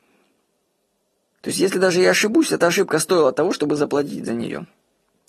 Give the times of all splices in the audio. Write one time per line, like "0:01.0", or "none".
none